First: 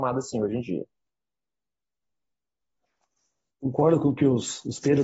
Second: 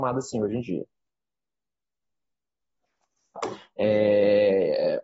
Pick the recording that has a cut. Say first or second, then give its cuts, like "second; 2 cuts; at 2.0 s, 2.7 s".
second; 1 cut; at 3.4 s